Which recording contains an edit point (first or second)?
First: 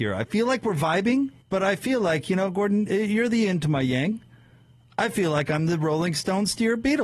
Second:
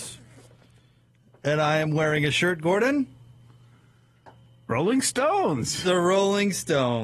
first